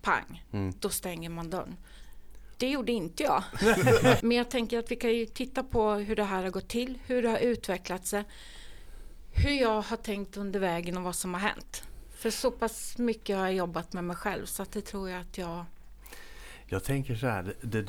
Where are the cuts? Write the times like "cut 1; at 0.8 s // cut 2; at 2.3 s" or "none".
cut 1; at 2.5 s // cut 2; at 4.2 s